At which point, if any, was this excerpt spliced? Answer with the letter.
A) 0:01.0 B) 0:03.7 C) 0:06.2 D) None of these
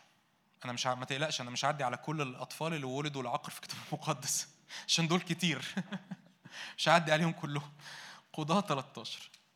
D